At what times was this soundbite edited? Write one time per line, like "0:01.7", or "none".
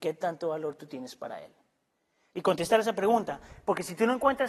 0:02.3